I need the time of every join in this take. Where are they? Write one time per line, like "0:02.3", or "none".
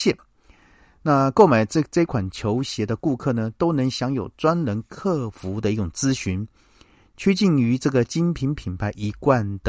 none